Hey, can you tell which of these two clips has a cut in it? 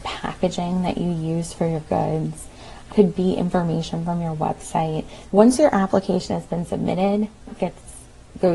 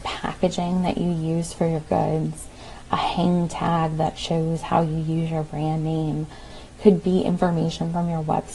first; 3 cuts; at 2.9 s, 5.3 s, 7.5 s

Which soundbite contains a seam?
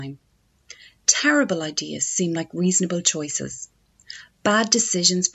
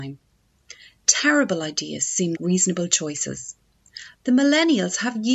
second; 2 cuts; at 2.3 s, 4.1 s

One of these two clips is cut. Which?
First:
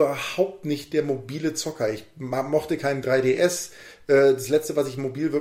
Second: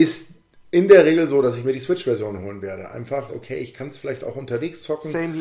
second; 1 cut; at 3.3 s

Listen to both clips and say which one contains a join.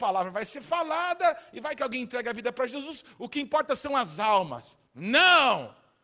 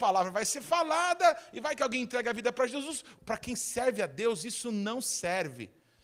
second; 1 cut; at 3.2 s

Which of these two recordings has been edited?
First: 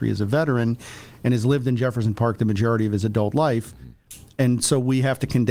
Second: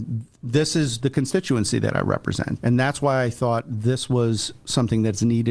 second; 1 cut; at 2.6 s

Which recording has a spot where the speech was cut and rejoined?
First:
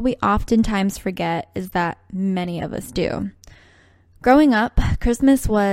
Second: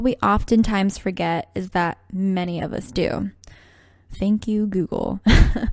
second; 1 cut; at 4.1 s

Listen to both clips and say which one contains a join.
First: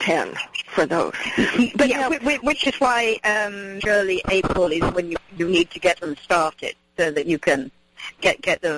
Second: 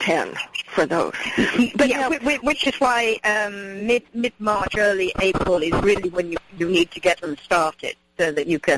first; 2 cuts; at 3.8 s, 4.9 s

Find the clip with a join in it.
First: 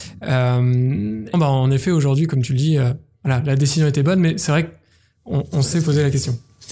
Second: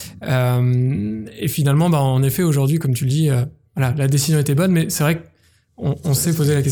first; 1 cut; at 1.3 s

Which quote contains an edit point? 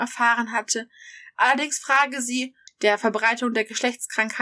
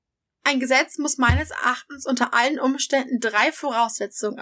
first; 1 cut; at 2.7 s

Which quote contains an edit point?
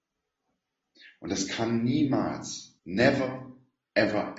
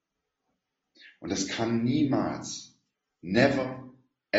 first; 1 cut; at 2.8 s

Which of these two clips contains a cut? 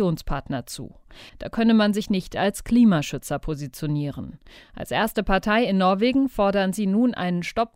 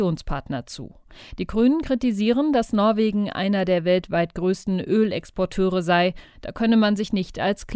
first; 1 cut; at 1.3 s

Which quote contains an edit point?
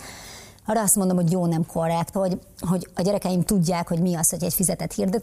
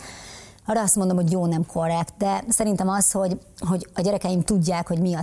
first; 1 cut; at 2.1 s

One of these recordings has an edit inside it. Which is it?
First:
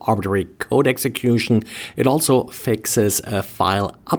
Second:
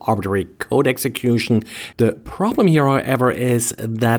second; 1 cut; at 1.9 s

